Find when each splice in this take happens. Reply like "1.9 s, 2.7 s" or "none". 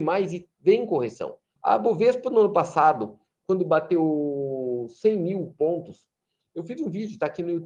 1.6 s